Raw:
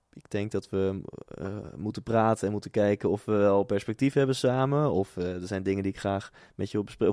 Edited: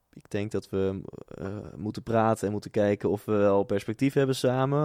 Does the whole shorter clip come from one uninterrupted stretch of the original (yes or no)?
yes